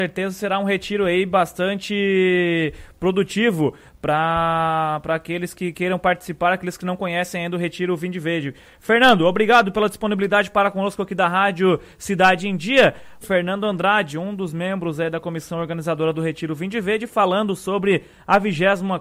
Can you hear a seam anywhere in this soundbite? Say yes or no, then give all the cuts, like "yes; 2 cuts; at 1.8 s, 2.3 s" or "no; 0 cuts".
yes; 1 cut; at 13.2 s